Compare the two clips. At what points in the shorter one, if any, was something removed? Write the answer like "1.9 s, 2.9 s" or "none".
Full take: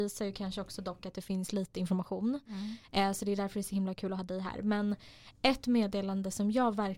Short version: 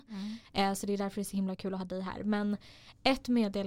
none